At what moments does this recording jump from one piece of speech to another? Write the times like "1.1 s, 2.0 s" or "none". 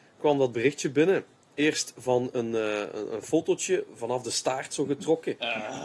none